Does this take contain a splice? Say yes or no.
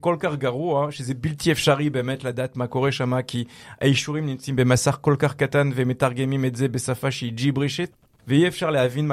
no